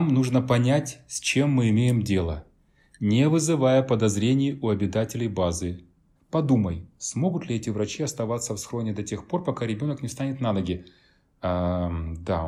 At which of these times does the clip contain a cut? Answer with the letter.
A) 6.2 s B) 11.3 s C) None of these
A